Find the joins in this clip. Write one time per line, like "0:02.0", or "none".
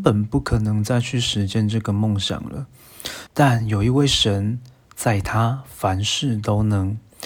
0:03.3